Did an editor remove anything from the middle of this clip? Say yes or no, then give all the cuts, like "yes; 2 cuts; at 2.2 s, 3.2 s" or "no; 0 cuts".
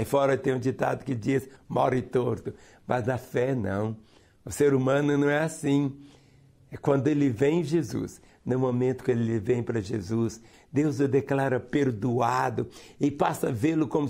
yes; 3 cuts; at 1.6 s, 8.3 s, 10.5 s